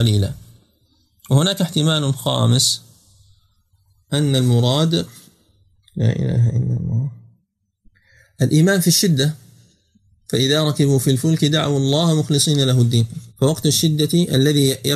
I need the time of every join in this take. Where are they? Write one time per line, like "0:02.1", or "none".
0:13.3